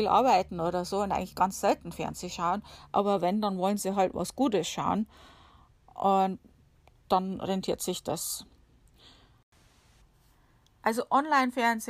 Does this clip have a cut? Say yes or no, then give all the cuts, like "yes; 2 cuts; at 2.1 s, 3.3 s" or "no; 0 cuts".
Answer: no; 0 cuts